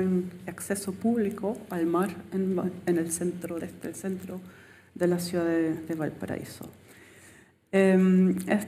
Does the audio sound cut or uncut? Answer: uncut